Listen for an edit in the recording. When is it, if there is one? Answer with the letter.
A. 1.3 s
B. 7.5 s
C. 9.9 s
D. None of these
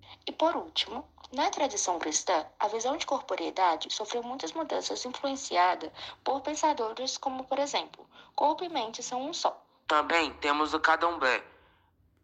C